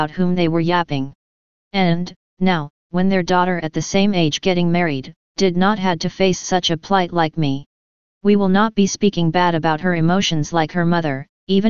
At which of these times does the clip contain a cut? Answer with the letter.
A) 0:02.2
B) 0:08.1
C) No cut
C